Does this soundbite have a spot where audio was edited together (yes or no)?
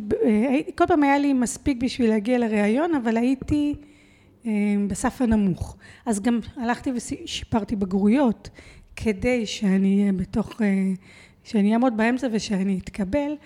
no